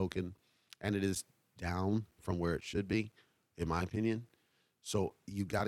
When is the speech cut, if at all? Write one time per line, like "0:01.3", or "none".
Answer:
none